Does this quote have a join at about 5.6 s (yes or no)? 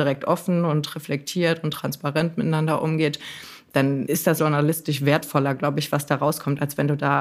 no